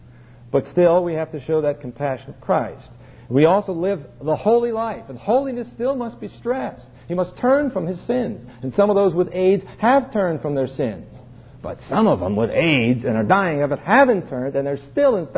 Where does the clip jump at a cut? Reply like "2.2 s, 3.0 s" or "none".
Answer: none